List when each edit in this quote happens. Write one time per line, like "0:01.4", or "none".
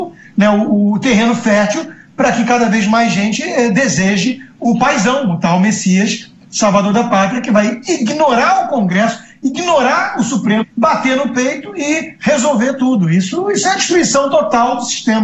0:10.6